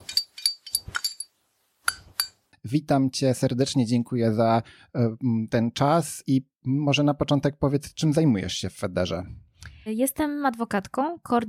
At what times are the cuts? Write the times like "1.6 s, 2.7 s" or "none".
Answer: 9.9 s